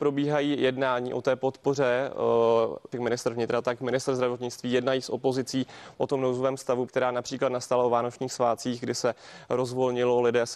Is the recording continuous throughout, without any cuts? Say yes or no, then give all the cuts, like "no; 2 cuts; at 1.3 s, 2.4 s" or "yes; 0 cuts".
no; 2 cuts; at 2.9 s, 6.9 s